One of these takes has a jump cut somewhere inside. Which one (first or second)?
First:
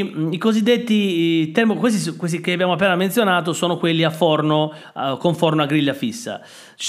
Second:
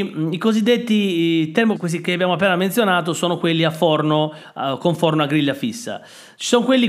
second